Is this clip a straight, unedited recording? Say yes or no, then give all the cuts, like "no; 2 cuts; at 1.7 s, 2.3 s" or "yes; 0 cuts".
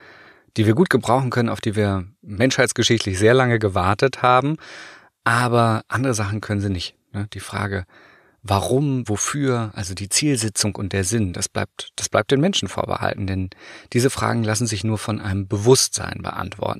no; 1 cut; at 9.1 s